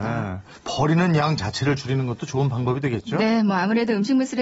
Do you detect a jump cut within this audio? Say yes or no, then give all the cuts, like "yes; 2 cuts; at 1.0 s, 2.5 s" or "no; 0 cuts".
no; 0 cuts